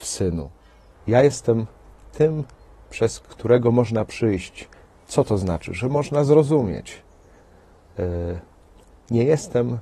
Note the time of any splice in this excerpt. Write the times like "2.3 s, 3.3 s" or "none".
1.0 s